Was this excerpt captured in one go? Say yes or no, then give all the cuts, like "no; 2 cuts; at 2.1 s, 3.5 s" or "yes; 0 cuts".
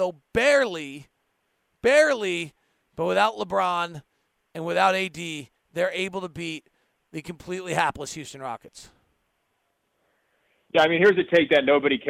yes; 0 cuts